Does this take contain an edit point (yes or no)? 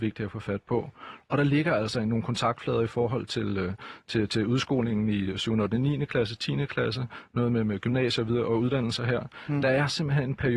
no